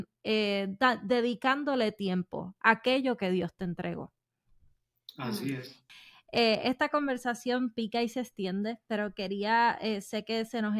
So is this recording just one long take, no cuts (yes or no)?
yes